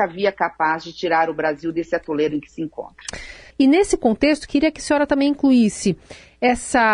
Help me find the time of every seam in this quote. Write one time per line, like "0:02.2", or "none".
0:03.5